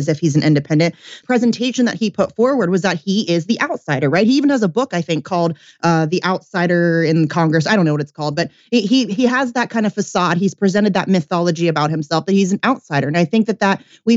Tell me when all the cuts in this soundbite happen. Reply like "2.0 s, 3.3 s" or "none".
1.2 s